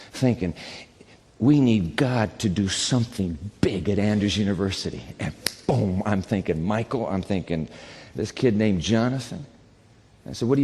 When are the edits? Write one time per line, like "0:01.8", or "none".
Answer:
none